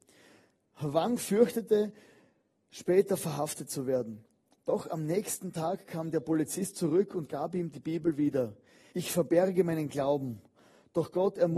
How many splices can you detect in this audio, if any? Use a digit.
1